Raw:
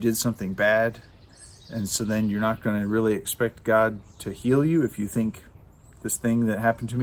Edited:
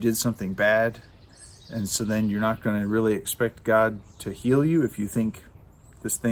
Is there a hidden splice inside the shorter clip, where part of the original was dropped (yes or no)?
no